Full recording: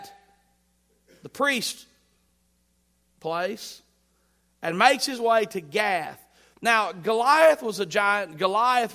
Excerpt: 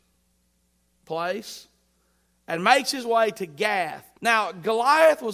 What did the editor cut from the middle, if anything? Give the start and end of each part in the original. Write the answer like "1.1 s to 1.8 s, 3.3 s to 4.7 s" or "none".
6.3 s to 6.6 s